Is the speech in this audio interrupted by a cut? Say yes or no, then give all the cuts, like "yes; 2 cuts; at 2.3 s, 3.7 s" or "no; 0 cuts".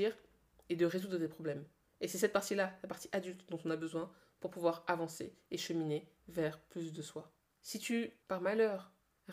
no; 0 cuts